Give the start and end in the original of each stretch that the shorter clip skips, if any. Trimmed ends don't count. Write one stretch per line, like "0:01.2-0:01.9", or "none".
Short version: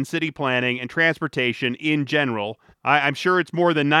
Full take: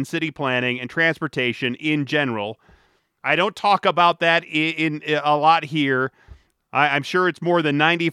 0:02.7-0:06.6